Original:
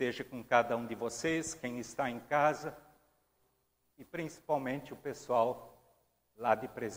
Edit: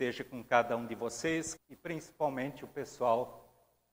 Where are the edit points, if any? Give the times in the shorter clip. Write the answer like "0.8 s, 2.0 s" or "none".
1.6 s